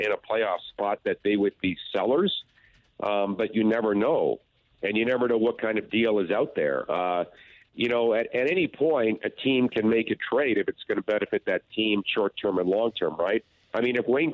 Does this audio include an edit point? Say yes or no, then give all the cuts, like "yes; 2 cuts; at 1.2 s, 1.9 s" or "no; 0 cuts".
no; 0 cuts